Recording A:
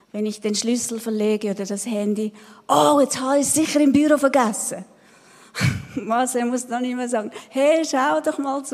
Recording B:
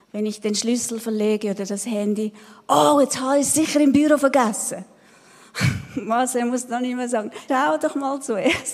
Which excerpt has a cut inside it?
B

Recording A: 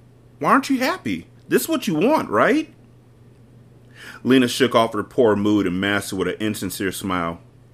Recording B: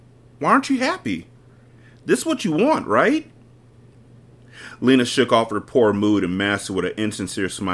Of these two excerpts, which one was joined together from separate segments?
A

